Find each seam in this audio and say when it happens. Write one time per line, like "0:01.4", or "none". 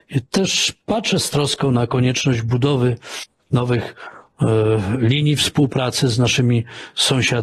none